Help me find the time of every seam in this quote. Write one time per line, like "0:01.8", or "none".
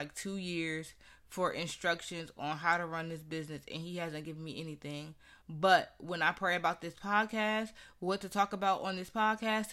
none